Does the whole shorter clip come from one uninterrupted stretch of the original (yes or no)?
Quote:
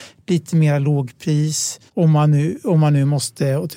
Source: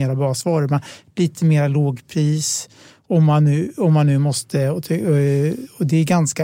no